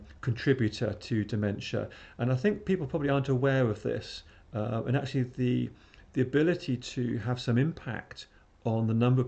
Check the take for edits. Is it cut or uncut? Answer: uncut